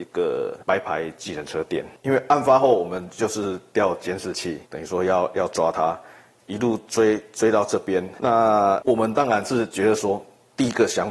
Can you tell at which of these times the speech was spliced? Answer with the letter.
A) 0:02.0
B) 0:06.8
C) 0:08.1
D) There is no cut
D